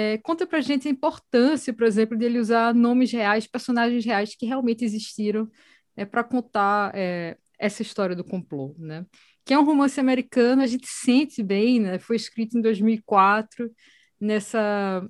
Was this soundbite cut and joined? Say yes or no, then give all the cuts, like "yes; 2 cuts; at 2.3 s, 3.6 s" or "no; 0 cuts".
no; 0 cuts